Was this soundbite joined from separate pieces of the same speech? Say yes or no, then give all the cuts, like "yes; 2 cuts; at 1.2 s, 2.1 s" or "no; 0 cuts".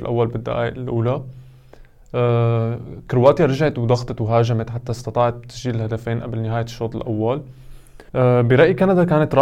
yes; 1 cut; at 8.1 s